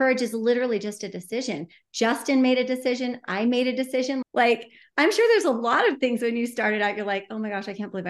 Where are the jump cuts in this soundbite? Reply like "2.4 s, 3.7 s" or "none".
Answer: 4.2 s